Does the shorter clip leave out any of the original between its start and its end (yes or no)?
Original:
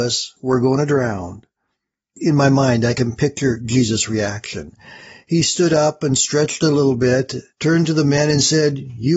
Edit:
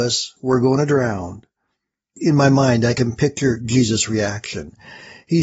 no